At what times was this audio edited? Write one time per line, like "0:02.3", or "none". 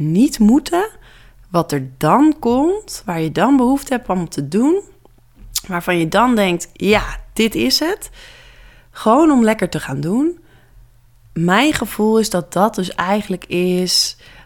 none